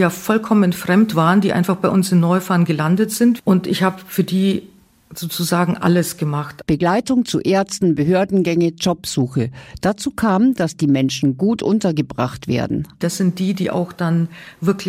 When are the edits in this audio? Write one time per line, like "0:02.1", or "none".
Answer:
0:13.0